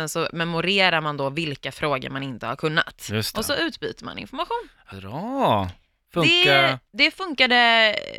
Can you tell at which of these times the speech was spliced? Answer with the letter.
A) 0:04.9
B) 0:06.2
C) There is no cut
A